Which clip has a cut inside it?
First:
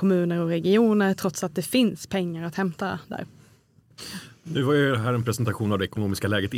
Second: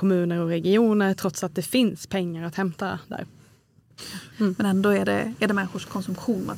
second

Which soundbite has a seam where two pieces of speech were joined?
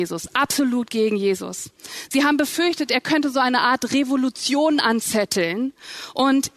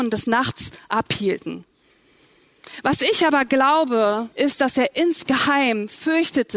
second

